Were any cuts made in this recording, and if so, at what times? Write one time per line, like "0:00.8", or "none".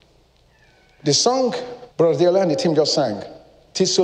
0:01.9